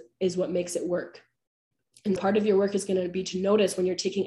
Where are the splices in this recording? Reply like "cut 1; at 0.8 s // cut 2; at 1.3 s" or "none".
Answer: cut 1; at 2.2 s